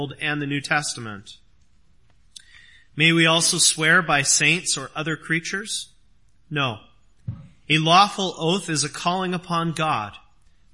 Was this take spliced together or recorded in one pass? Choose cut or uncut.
uncut